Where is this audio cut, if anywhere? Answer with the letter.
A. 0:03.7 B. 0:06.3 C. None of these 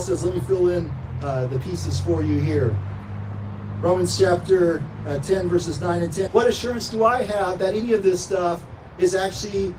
B